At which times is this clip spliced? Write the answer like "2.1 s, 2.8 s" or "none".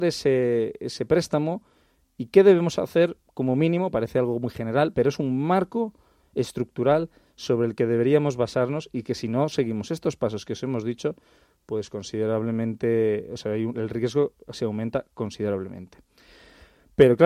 none